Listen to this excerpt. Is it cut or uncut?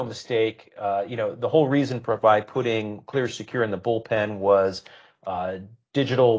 uncut